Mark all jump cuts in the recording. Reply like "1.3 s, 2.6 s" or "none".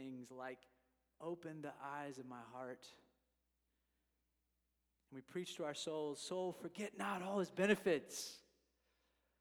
none